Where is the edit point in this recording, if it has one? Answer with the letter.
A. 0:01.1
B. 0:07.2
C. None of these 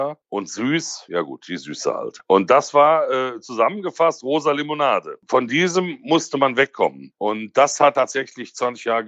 C